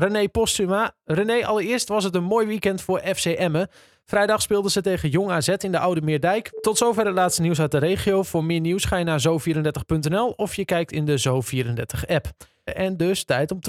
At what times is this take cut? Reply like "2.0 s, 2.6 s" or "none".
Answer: 6.5 s, 12.7 s